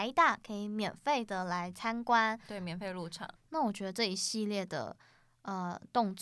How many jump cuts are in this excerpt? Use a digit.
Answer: 1